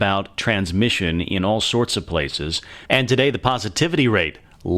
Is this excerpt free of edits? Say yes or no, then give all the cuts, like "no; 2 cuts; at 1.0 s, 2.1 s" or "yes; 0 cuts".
no; 1 cut; at 2.9 s